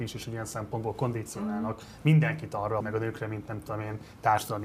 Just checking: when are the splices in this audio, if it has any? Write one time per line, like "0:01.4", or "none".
0:02.8

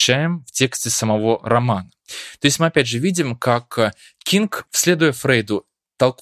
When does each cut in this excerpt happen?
0:04.6

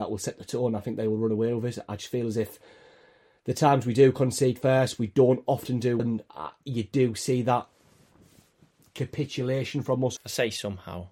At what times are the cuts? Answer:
0:06.0
0:10.2

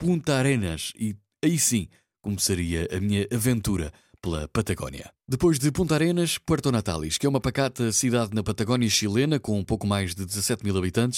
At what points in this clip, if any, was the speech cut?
none

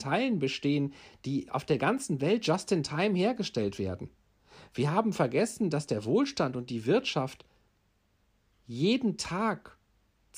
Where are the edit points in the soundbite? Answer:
none

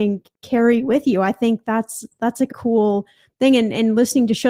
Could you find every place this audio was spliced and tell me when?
0:02.5

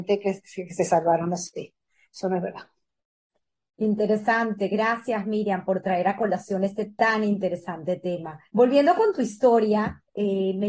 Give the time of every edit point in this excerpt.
0:02.1
0:08.5

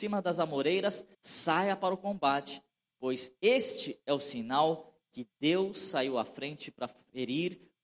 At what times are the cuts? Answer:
0:01.1

